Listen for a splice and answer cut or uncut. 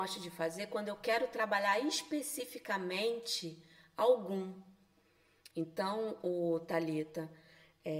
cut